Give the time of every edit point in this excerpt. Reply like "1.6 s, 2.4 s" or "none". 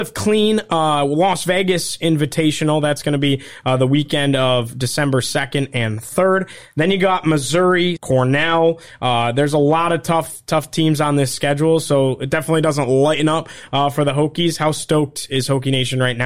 8.0 s